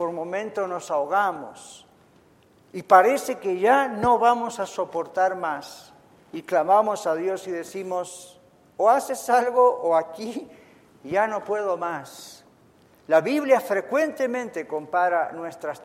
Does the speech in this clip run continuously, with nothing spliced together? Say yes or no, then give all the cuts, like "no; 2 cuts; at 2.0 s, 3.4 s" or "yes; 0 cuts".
yes; 0 cuts